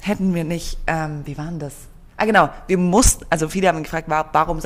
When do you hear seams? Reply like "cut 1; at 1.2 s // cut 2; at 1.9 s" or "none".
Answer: none